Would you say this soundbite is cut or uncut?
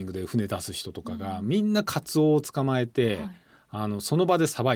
uncut